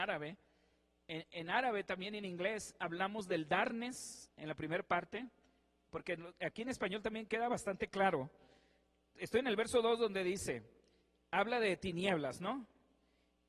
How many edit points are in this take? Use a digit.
0